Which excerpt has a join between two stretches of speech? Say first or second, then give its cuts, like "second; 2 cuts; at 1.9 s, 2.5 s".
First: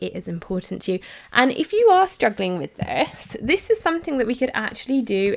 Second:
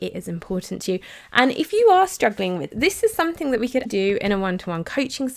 second; 2 cuts; at 2.7 s, 3.9 s